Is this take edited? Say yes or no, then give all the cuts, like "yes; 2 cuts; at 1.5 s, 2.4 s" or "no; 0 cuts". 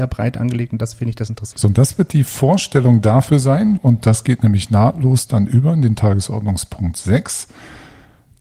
yes; 2 cuts; at 1.5 s, 3.8 s